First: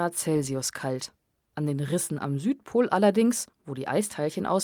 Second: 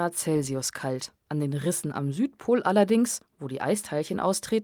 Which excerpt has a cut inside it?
second; 1 cut; at 1.2 s

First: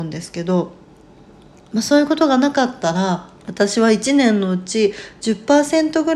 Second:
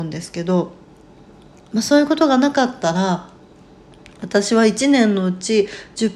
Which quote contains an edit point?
first; 1 cut; at 3.4 s

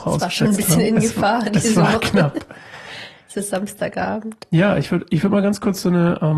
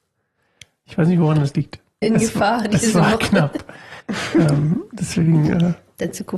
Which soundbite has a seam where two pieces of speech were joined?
second; 2 cuts; at 2.0 s, 4.0 s

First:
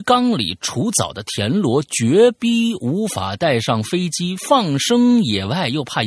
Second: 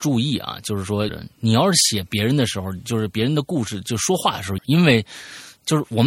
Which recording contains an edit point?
second; 2 cuts; at 1.1 s, 4.6 s

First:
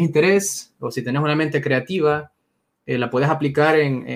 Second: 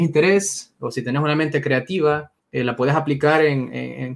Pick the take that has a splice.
second; 1 cut; at 2.4 s

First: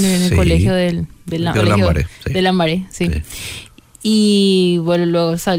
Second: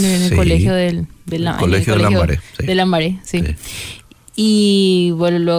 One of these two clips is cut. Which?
first; 1 cut; at 1.5 s

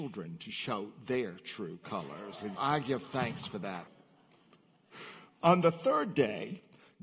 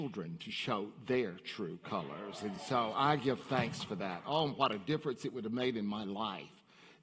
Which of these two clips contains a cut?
first; 2 cuts; at 2.6 s, 3.9 s

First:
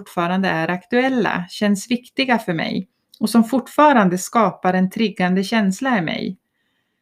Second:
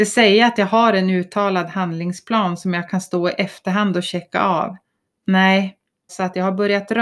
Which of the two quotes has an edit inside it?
second; 1 cut; at 6.1 s

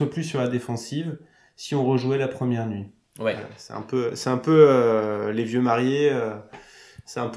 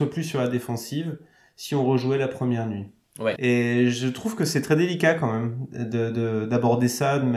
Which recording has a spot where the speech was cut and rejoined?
second; 1 cut; at 3.4 s

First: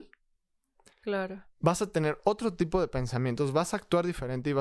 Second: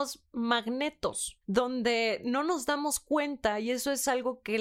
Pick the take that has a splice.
second; 1 cut; at 1.4 s

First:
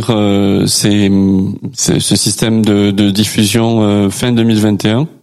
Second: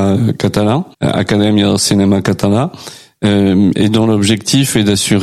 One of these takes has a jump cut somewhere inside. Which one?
second; 1 cut; at 0.9 s

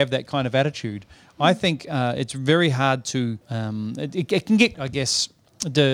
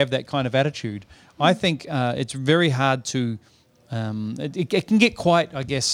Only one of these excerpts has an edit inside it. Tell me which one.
first; 2 cuts; at 3.4 s, 4.7 s

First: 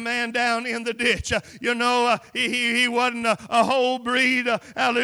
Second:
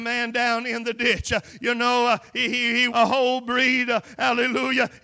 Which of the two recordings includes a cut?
second; 1 cut; at 2.9 s

